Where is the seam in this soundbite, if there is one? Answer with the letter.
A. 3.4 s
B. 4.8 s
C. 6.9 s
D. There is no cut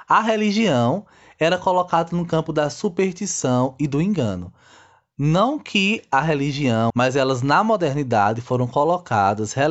C